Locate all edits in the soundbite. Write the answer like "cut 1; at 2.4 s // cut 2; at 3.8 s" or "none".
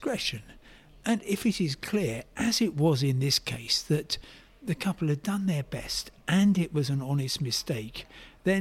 none